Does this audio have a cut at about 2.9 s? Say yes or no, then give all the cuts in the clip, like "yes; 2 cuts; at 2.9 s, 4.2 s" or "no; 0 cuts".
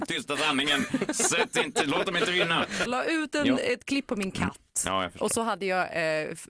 yes; 1 cut; at 2.9 s